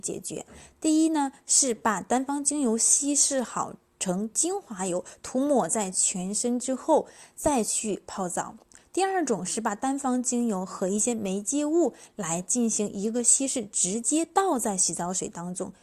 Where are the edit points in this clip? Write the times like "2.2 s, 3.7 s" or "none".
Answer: none